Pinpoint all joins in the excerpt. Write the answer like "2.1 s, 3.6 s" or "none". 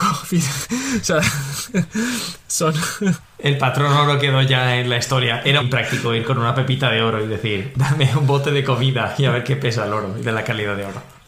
5.6 s